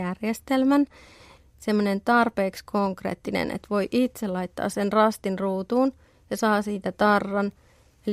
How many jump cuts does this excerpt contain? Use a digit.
1